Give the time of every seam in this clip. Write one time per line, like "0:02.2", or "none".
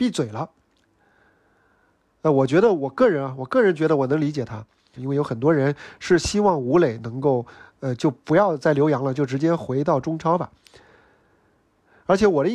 0:05.0

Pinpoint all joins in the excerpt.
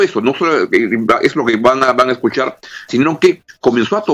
0:02.9

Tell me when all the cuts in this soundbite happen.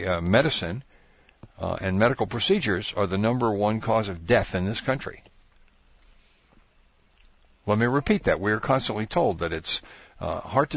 none

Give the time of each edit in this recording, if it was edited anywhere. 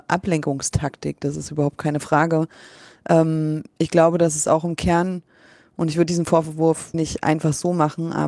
0:06.9

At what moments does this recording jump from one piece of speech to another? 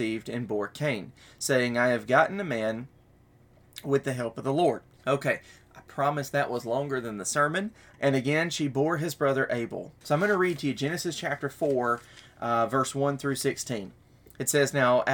0:05.0
0:07.9
0:10.0

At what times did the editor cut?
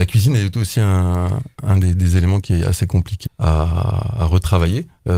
0:03.3

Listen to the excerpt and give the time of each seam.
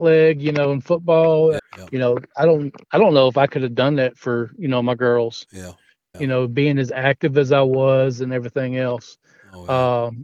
0:01.6
0:06.1

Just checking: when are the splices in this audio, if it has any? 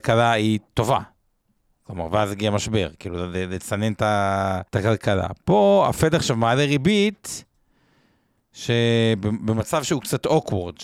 0:04.7

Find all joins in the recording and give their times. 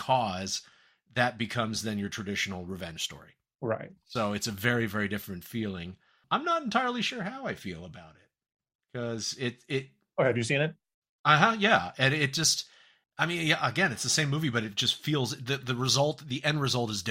none

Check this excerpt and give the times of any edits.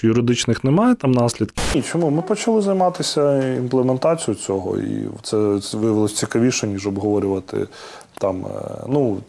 none

